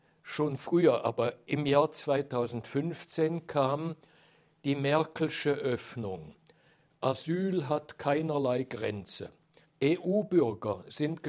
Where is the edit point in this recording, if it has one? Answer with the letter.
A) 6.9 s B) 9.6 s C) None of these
B